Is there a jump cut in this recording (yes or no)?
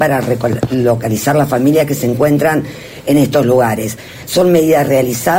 no